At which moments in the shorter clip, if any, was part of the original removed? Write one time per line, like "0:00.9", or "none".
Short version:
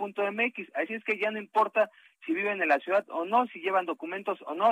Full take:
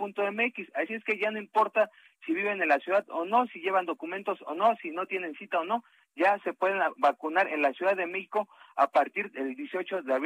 none